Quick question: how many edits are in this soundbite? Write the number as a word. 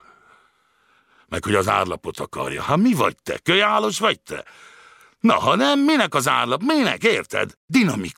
zero